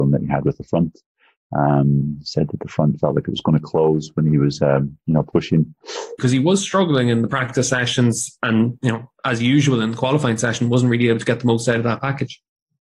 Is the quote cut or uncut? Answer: cut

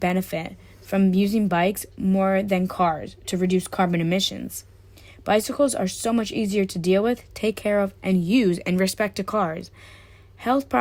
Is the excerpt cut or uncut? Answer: uncut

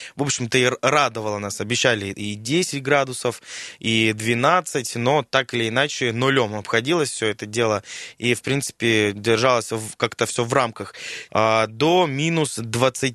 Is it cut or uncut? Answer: cut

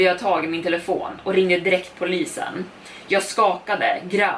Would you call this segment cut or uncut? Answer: uncut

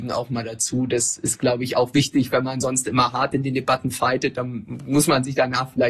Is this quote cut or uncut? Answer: uncut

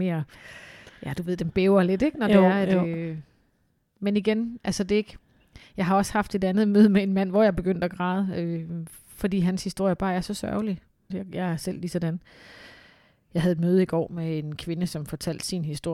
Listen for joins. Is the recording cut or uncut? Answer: cut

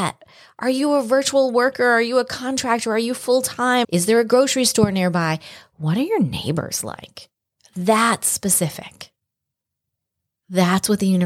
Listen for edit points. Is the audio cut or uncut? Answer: cut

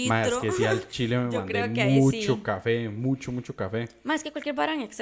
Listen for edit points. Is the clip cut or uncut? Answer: uncut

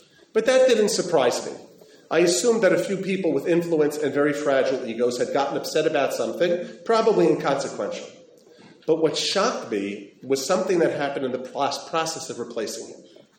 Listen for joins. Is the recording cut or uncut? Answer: uncut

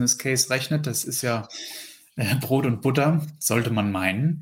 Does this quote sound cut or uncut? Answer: uncut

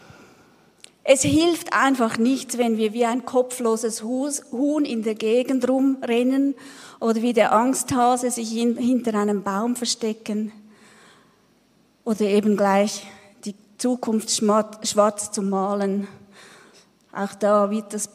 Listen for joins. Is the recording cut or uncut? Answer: uncut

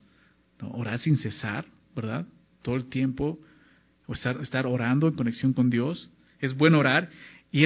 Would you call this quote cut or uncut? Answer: uncut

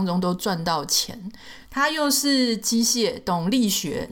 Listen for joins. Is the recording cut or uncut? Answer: cut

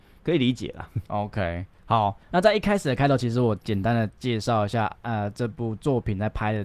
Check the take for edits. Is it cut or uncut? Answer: uncut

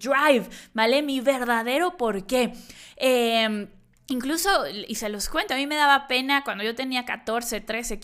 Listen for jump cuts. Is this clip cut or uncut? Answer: uncut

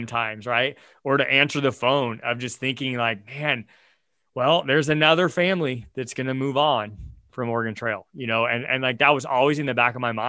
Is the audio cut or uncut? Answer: uncut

